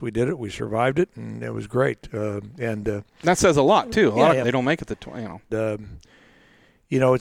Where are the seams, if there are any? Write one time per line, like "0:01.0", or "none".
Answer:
0:04.4
0:05.5